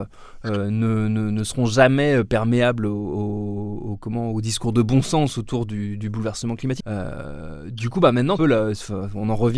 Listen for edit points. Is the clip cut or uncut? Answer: cut